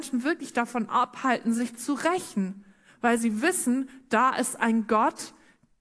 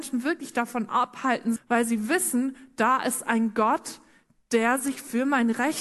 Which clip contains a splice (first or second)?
second